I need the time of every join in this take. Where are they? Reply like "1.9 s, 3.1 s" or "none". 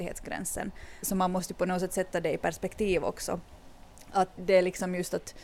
1.0 s, 4.4 s